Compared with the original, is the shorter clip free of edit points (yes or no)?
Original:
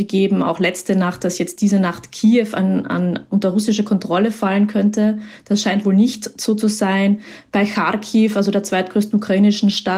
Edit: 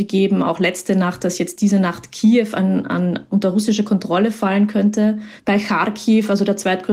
no